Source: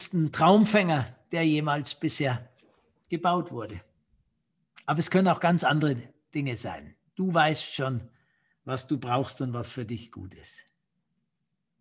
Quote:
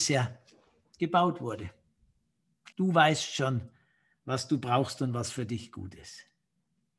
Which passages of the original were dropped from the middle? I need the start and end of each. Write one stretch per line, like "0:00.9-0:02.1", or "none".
0:04.8-0:07.1